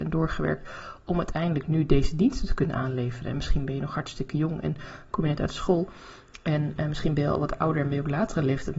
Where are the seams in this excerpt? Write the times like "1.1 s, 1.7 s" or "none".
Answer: none

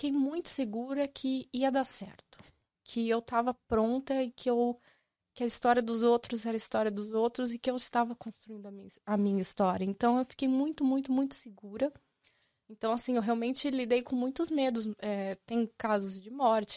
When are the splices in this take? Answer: 12.6 s

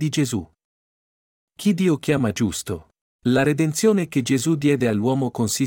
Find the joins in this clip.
3.2 s

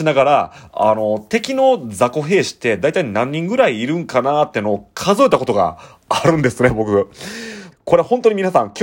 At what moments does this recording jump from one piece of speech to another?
7.7 s

